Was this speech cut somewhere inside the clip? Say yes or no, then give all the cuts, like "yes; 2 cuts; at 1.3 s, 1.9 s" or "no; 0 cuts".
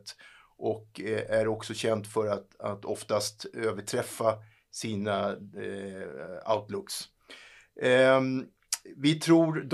no; 0 cuts